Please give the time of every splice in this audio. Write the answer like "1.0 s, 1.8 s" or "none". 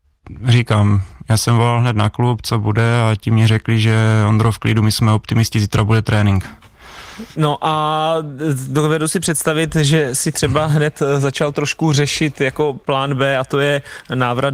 none